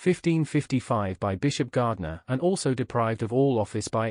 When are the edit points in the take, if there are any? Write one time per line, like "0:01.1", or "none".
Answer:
none